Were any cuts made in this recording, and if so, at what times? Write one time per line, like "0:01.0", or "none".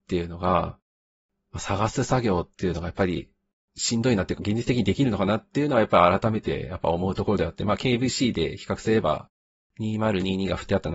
0:04.4

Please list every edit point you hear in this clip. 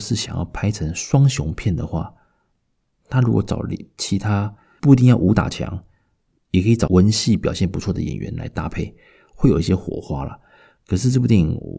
none

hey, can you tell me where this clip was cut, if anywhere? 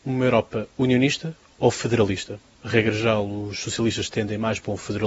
none

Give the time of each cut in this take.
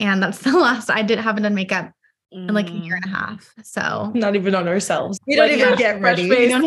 0:05.2

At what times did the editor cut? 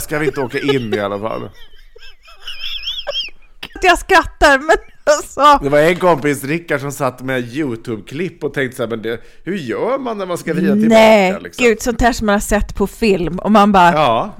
0:03.8

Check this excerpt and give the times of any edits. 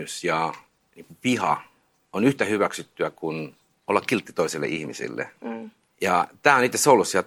none

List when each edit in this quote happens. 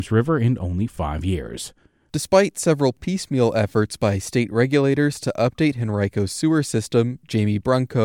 0:02.1

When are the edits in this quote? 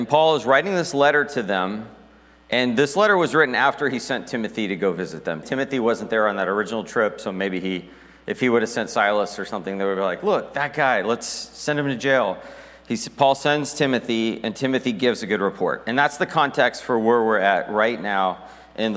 0:05.4

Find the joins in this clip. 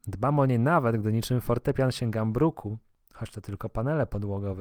none

